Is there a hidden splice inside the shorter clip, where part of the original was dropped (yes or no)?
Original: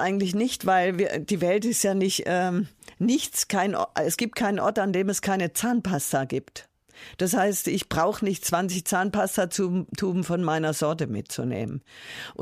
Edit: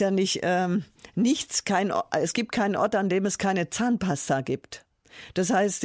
no